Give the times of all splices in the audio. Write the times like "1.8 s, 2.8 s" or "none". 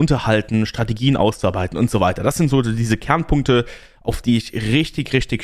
none